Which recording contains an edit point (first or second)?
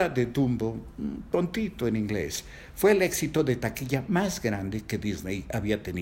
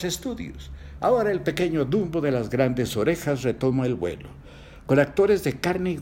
second